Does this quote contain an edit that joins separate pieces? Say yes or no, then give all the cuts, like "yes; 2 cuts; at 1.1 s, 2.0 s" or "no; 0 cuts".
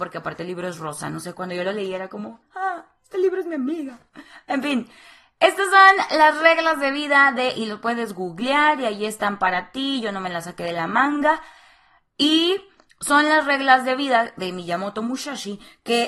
no; 0 cuts